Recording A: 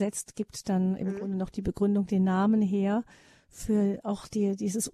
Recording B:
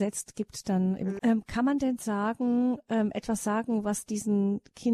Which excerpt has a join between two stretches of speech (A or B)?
B